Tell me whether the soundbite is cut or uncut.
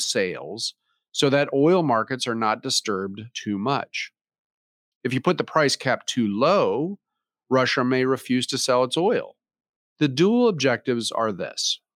cut